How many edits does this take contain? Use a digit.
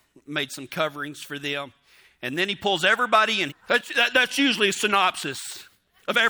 1